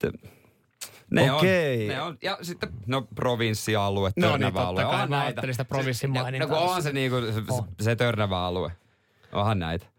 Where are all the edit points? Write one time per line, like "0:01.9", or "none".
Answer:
none

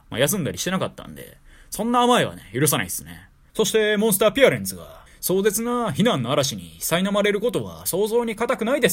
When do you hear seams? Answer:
0:03.5
0:05.1

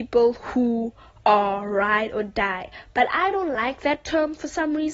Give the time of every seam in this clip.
none

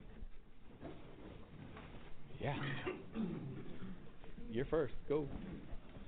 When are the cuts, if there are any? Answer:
none

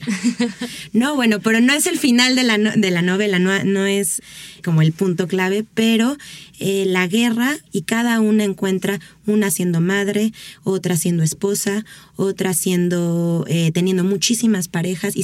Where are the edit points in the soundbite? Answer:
0:07.7

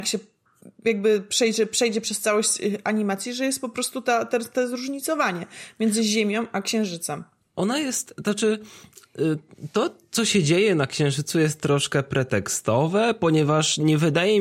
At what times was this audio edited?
none

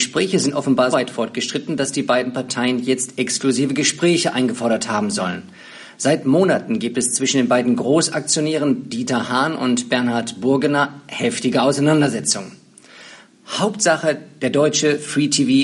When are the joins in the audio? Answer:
0:00.9

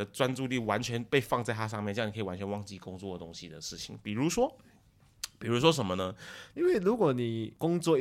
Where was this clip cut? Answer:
0:06.5

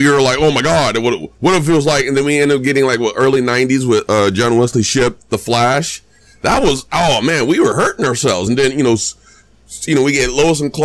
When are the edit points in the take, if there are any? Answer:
none

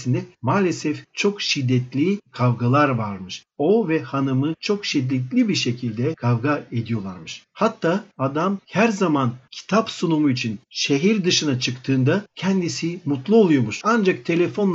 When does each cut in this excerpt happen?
0:13.8

